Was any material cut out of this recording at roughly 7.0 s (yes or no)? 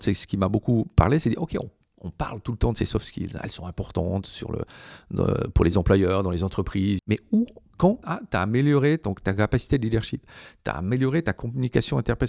yes